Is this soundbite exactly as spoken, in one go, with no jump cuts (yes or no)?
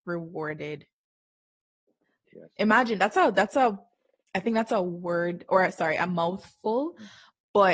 no